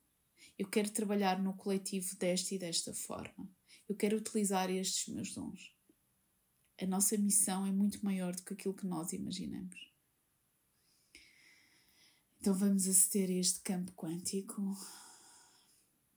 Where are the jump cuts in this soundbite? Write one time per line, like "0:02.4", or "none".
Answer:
none